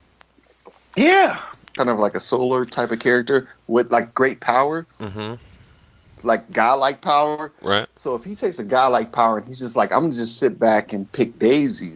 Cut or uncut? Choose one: cut